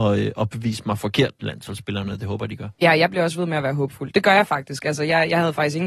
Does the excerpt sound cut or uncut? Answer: uncut